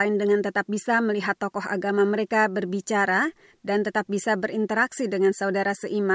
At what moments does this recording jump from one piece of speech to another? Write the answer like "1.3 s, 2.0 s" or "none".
none